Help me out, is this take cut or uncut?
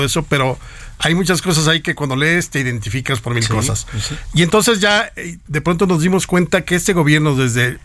cut